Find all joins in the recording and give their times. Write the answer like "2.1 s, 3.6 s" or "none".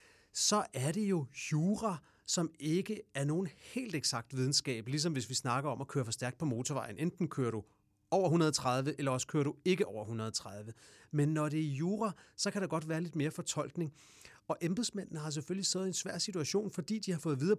none